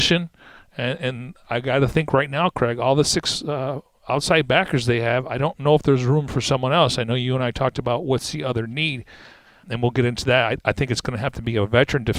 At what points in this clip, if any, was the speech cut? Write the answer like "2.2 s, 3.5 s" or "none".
9.6 s